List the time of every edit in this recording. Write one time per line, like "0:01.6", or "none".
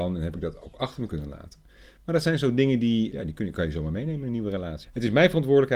0:03.1
0:04.8